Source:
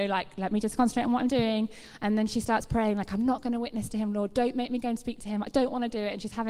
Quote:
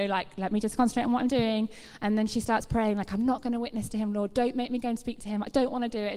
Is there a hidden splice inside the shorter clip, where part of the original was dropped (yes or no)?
no